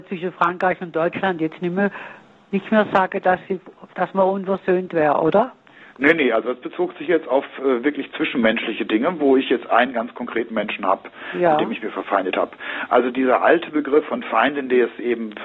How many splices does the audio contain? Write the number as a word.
zero